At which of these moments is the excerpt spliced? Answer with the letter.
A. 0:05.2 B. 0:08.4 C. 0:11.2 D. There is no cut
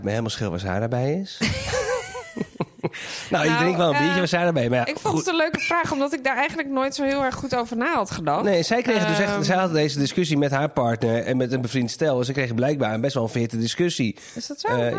C